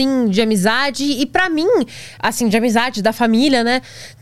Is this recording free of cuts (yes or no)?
yes